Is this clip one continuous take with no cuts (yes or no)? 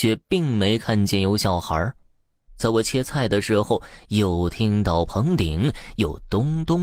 no